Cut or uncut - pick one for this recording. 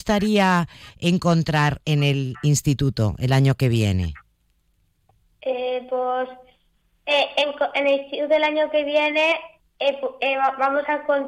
uncut